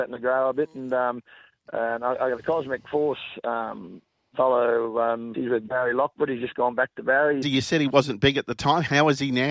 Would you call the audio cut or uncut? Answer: cut